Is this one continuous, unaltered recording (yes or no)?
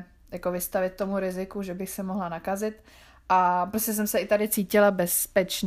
yes